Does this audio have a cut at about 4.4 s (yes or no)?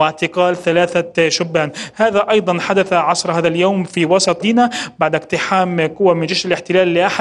yes